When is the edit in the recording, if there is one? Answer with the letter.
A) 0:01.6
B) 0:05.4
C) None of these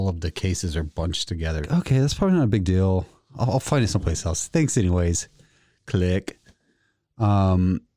A